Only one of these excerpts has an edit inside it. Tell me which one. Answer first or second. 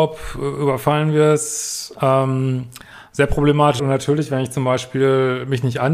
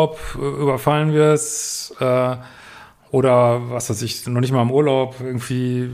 first